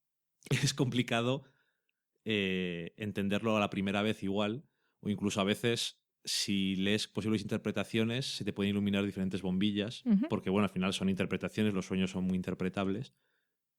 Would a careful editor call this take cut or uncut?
uncut